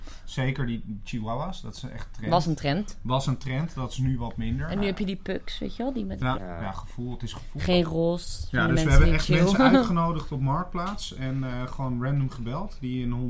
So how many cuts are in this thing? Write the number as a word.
two